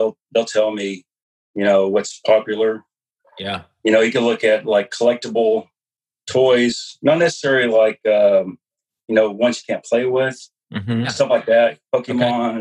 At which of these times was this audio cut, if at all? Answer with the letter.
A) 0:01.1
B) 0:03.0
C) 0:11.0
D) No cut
C